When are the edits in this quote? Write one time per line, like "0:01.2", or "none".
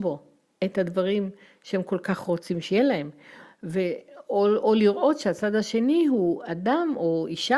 none

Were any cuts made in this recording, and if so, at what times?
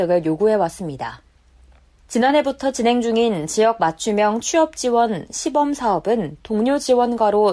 none

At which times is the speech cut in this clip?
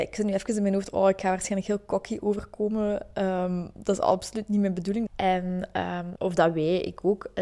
0:05.1
0:06.2

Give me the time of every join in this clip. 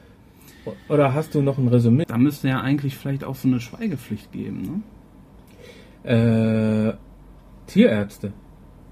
0:02.0

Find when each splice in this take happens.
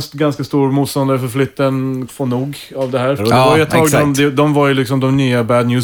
0:02.1
0:03.2

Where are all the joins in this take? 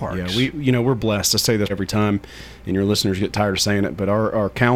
0:01.7

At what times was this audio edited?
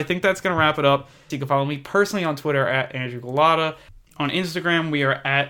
0:01.3

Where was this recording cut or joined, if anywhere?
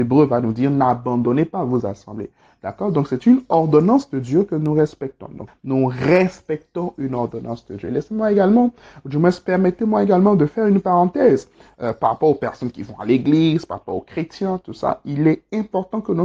0:05.5

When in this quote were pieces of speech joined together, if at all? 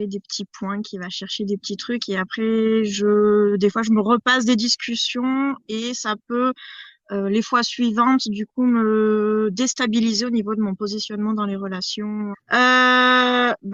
0:12.3

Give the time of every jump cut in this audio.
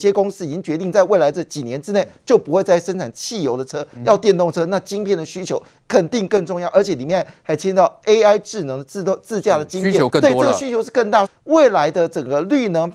0:10.1
0:11.3

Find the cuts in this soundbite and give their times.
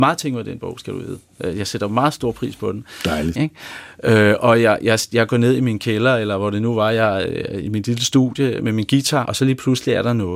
0:03.3
0:09.2

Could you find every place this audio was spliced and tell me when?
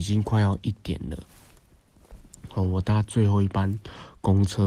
none

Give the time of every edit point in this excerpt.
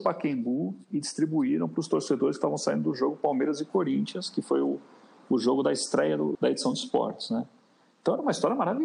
0:06.3

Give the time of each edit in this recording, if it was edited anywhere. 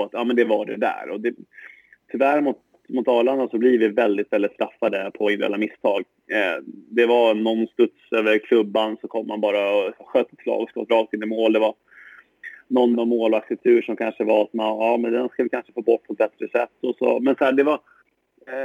0:12.9

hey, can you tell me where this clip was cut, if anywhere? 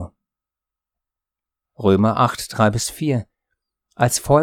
0:01.6

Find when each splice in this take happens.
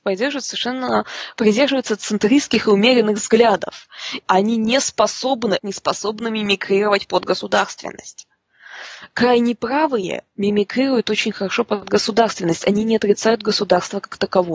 0:04.2
0:05.6

